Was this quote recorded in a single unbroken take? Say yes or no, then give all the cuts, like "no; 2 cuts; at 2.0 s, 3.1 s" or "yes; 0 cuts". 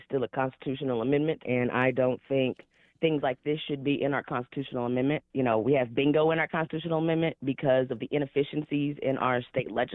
yes; 0 cuts